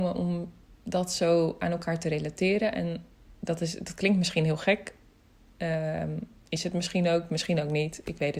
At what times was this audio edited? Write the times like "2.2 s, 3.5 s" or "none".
none